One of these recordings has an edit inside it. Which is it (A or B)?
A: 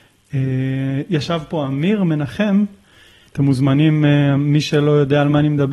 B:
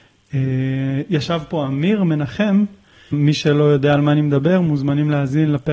B